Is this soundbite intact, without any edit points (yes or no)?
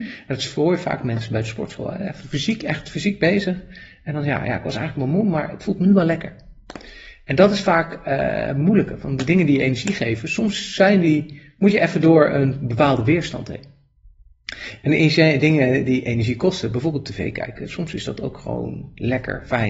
yes